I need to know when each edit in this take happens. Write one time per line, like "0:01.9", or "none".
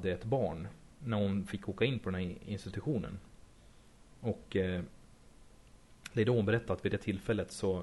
none